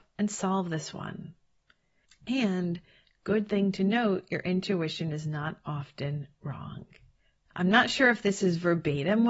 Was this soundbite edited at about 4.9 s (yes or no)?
no